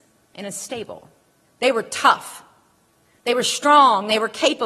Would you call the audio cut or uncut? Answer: cut